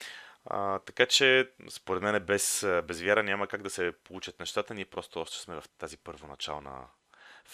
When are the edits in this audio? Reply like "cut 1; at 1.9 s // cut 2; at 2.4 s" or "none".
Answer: cut 1; at 5.7 s